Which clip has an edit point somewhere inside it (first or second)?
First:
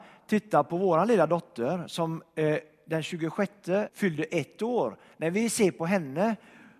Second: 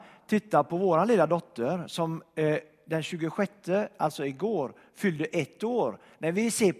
first